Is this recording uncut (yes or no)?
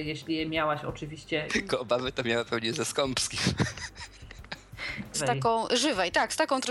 no